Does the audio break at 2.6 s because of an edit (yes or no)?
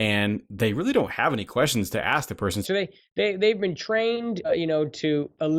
yes